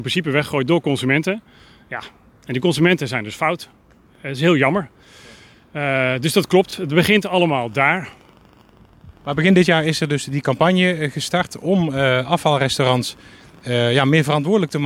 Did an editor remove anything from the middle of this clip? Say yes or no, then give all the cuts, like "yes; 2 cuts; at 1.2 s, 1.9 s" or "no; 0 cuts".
no; 0 cuts